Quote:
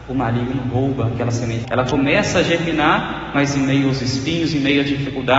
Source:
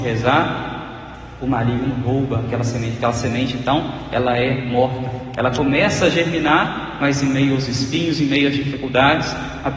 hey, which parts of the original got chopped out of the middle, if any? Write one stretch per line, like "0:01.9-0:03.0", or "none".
0:03.0-0:05.3